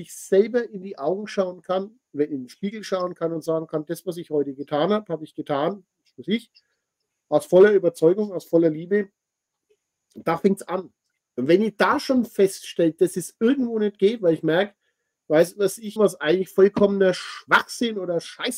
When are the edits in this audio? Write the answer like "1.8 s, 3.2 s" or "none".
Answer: 16.0 s